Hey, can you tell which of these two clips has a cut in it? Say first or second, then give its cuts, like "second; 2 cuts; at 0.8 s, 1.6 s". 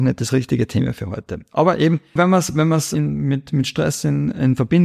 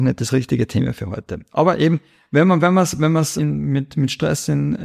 first; 1 cut; at 2.2 s